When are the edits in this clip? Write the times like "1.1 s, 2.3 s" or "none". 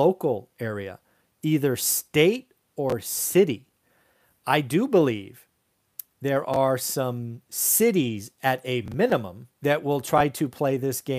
9.5 s